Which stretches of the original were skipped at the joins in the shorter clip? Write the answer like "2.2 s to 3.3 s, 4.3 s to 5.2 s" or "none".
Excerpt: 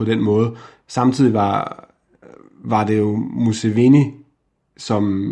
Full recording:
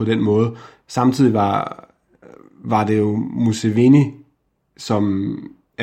none